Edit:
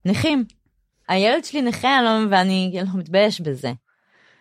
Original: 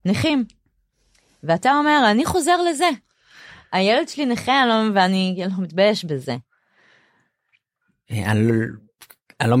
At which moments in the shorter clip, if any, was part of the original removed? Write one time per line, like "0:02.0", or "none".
0:01.0